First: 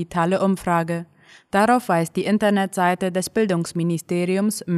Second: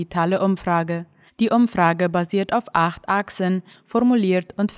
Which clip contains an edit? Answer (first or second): second